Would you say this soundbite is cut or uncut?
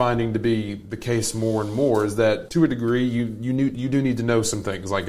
cut